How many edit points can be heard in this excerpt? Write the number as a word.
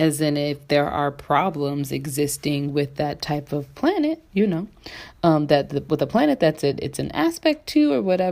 zero